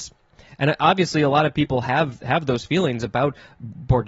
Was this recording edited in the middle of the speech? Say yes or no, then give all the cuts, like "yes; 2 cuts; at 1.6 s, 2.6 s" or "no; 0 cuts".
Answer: no; 0 cuts